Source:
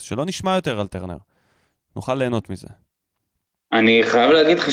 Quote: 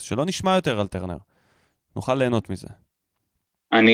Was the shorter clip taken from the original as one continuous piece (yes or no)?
yes